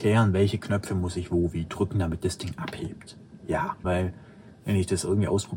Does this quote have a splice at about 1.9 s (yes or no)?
no